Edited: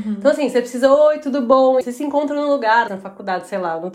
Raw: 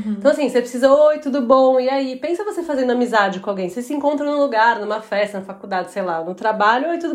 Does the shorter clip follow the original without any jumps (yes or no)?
no